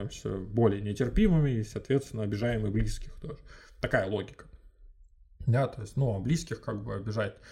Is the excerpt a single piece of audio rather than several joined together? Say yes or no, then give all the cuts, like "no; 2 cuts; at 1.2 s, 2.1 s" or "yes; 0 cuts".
yes; 0 cuts